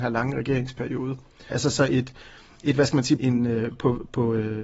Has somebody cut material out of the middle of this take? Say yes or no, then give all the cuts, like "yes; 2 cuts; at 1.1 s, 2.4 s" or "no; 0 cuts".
yes; 2 cuts; at 1.5 s, 3.2 s